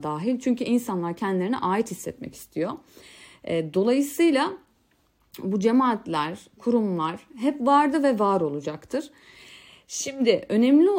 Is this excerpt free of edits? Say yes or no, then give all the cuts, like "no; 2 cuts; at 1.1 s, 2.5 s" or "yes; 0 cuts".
yes; 0 cuts